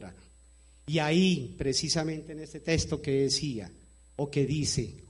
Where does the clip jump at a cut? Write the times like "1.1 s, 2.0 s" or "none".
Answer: none